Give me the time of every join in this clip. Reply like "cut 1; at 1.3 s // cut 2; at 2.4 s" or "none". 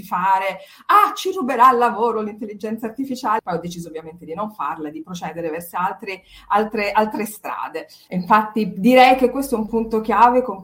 cut 1; at 3.4 s // cut 2; at 8.1 s